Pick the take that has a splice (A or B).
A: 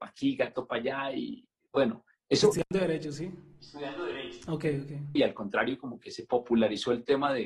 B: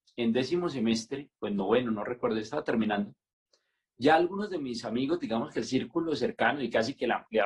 A